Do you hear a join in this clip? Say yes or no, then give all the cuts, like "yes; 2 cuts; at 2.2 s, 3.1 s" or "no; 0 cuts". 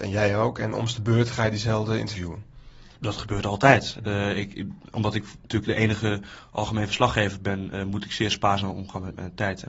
yes; 1 cut; at 3.0 s